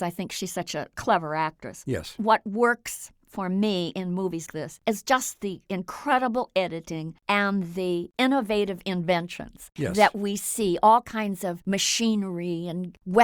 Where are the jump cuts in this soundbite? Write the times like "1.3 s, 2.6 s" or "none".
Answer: 4.5 s

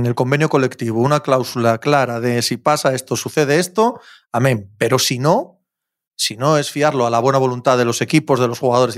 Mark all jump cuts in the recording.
none

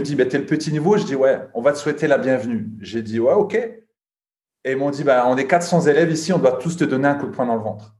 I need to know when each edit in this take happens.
none

